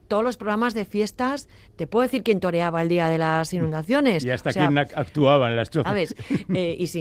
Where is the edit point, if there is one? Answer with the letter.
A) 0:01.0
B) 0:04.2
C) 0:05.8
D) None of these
C